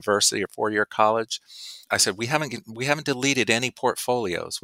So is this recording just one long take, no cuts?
no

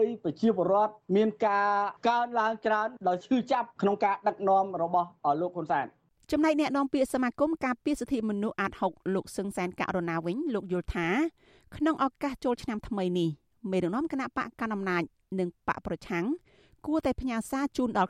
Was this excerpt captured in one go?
yes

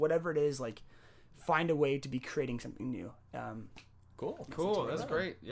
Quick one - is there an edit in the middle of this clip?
no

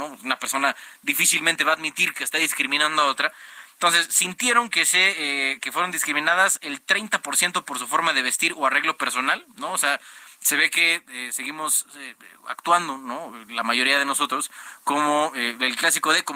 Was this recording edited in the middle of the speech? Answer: no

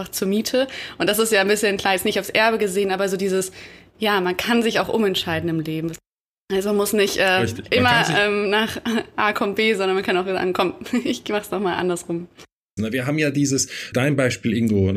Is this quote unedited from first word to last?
no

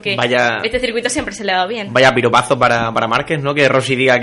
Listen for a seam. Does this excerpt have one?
no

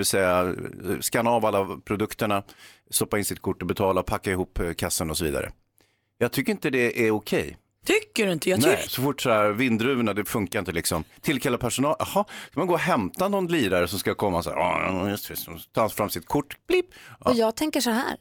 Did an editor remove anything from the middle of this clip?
yes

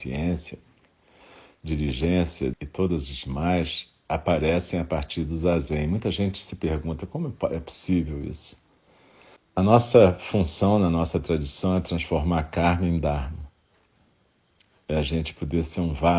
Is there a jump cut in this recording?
yes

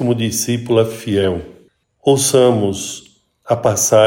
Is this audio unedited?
no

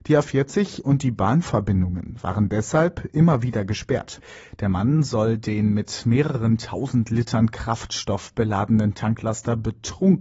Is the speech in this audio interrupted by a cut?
no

